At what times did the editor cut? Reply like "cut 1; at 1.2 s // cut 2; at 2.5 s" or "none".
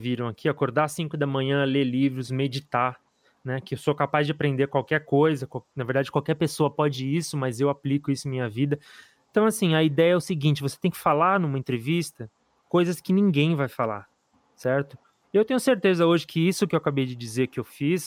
none